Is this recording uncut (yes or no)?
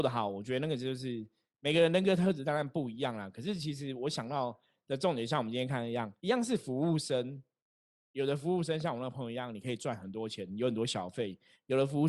no